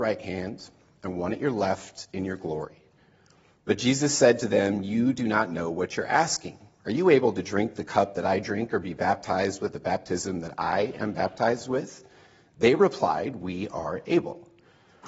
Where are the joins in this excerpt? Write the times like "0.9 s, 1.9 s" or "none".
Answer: none